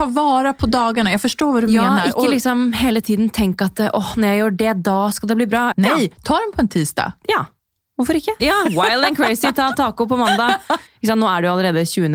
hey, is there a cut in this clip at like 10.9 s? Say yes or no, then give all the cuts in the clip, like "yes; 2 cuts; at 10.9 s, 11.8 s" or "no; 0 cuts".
yes; 3 cuts; at 5.7 s, 8.4 s, 10.9 s